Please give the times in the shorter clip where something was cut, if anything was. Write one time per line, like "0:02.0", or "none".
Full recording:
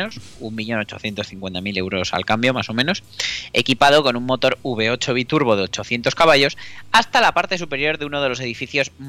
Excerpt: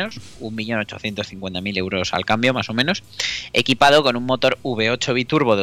none